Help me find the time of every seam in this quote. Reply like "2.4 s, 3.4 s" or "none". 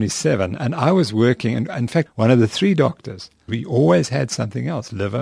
2.1 s, 3.5 s